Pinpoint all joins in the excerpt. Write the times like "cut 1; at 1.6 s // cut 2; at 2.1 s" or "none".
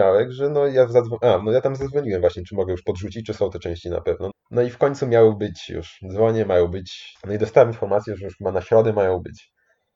cut 1; at 4.3 s // cut 2; at 7.2 s